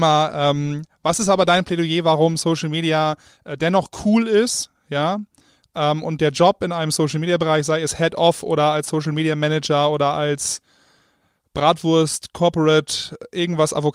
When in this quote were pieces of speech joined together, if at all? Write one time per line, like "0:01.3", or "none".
none